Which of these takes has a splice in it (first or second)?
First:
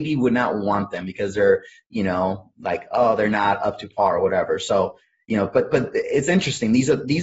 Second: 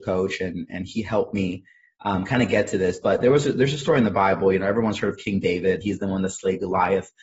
second